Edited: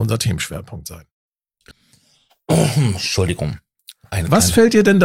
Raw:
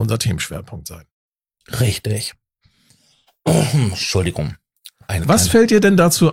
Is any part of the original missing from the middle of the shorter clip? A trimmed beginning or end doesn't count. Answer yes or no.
yes